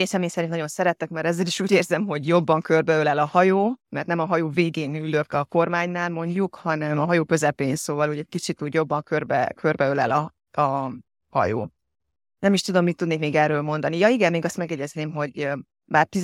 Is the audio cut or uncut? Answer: uncut